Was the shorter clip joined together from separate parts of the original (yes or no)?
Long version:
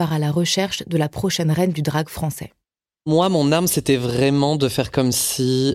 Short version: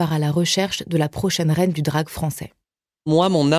no